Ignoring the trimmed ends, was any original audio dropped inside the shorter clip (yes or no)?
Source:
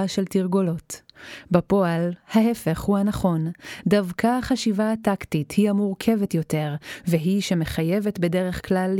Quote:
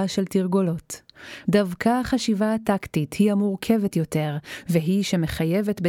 yes